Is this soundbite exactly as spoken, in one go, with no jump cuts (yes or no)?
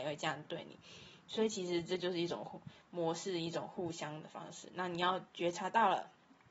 yes